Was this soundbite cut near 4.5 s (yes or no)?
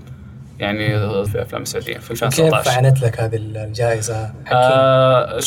yes